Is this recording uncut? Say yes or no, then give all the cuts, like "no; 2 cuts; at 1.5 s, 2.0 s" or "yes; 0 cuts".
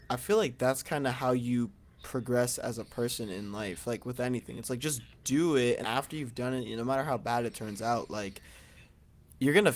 no; 1 cut; at 5.8 s